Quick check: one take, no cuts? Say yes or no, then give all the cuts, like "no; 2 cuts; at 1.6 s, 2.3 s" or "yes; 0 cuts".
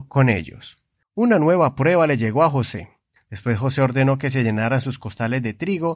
no; 2 cuts; at 1.0 s, 3.2 s